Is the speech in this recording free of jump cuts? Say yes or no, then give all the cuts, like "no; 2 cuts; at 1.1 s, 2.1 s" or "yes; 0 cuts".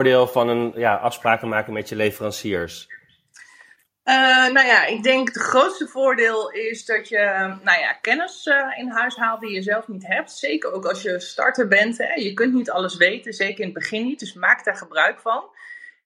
yes; 0 cuts